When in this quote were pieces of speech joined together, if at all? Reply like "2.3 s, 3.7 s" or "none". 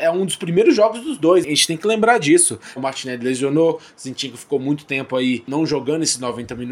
2.8 s